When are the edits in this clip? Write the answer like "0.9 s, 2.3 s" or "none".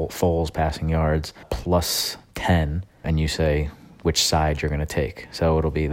1.4 s, 3.0 s